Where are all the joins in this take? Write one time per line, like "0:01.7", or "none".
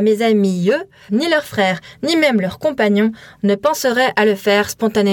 0:01.1